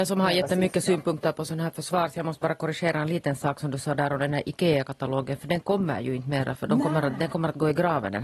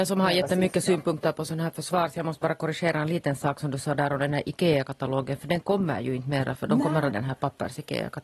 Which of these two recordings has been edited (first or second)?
second